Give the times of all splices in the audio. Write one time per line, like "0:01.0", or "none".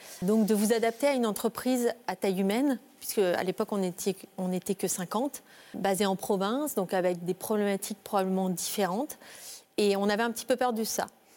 none